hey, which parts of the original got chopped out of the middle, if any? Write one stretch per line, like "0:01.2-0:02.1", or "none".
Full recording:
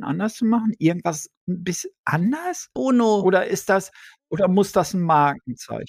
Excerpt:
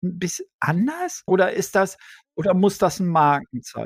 0:02.7-0:03.2